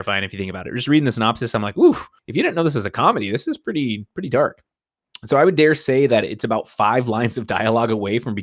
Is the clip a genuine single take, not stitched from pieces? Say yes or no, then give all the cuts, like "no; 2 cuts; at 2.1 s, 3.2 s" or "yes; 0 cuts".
no; 1 cut; at 2.2 s